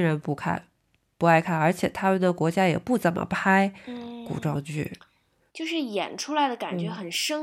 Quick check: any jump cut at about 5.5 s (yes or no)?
yes